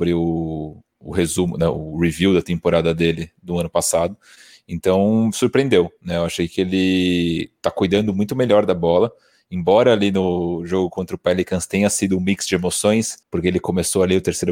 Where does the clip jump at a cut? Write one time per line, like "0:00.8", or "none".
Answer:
0:13.2